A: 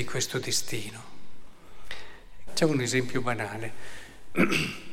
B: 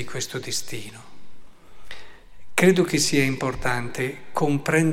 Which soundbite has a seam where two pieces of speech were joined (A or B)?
A